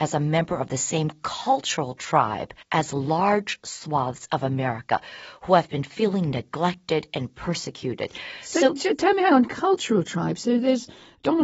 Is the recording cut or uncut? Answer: cut